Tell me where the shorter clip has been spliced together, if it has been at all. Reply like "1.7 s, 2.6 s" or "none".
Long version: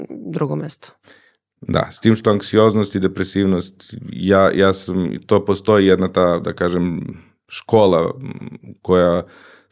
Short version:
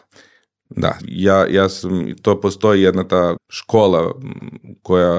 1.0 s, 3.4 s

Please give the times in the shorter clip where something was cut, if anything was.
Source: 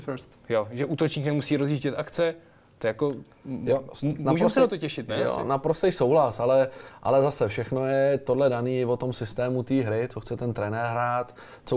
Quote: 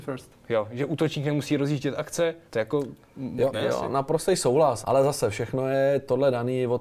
2.5 s, 3.5 s, 4.8 s

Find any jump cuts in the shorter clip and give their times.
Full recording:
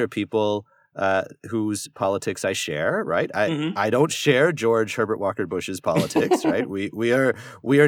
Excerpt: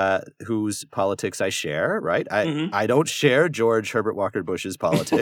none

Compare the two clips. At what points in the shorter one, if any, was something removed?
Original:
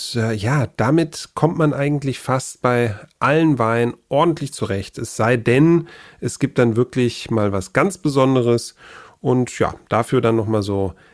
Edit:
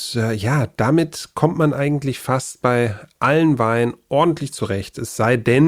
none

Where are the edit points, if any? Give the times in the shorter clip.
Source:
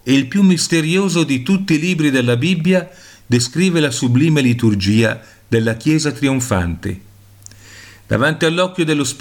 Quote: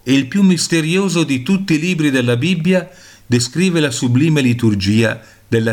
none

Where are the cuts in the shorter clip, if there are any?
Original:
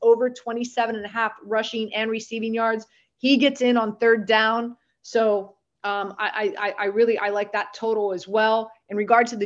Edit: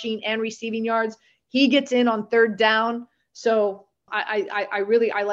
4.1 s

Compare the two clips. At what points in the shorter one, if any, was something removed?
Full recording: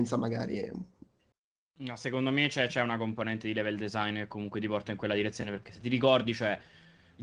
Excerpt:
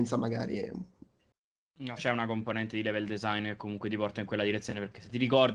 2.0 s

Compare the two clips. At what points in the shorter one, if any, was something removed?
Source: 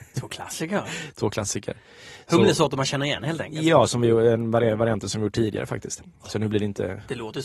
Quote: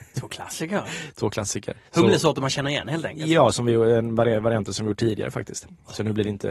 1.9 s

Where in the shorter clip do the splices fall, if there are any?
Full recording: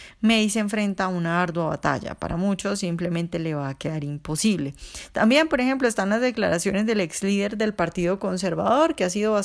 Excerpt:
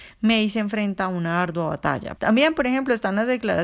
2.2 s

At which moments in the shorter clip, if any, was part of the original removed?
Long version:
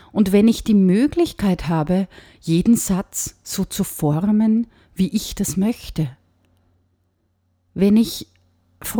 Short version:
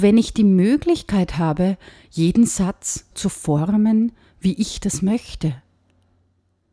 3.1 s

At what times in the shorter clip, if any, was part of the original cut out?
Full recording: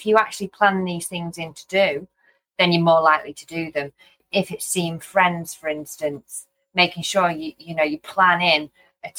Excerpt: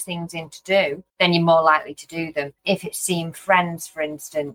1.1 s, 2.6 s

